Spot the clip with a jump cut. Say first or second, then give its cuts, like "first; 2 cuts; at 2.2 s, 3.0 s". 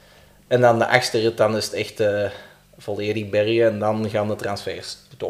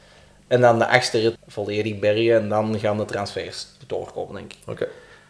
second; 1 cut; at 1.4 s